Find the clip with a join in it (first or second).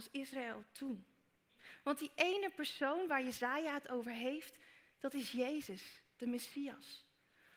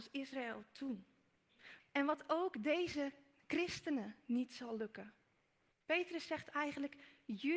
second